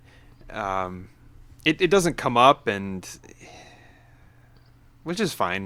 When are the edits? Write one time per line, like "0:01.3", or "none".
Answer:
none